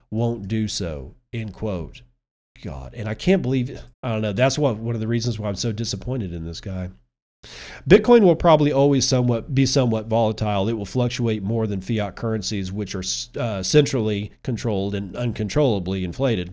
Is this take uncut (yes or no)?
no